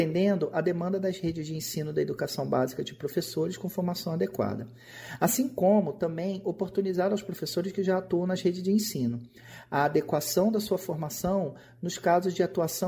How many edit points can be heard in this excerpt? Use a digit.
0